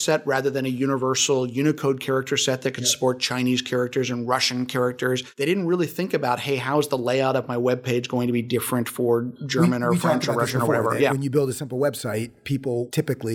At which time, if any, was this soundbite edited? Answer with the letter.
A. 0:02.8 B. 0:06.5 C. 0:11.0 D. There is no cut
D